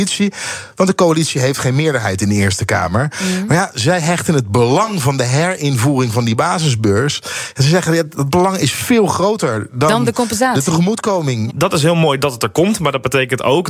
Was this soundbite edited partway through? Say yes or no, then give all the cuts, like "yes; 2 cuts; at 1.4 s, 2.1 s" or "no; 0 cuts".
yes; 1 cut; at 11.5 s